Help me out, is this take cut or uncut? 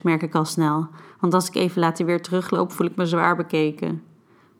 uncut